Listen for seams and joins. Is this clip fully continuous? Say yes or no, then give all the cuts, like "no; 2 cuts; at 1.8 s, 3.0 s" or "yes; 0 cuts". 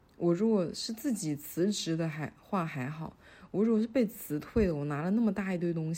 yes; 0 cuts